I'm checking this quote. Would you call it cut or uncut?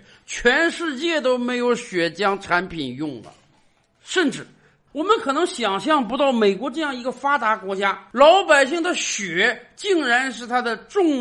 cut